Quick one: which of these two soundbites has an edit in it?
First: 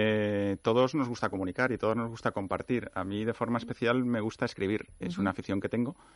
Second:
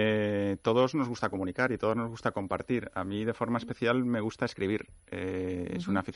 first; 1 cut; at 5.0 s

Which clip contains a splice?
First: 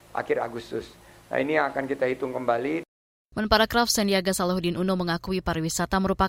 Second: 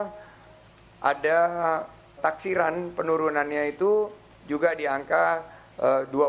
second; 1 cut; at 2.2 s

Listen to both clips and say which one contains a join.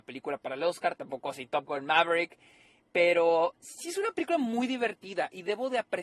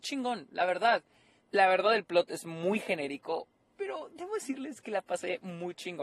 second; 1 cut; at 1.4 s

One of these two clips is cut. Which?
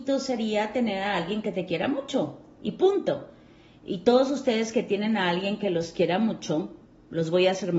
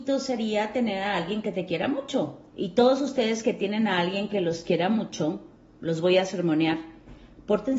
second; 1 cut; at 2.5 s

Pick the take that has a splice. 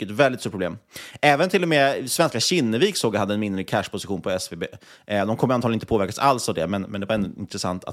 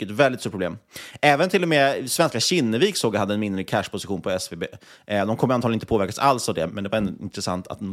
second; 1 cut; at 6.7 s

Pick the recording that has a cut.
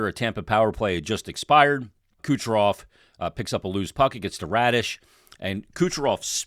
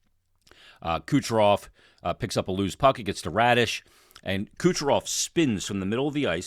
first; 1 cut; at 2.2 s

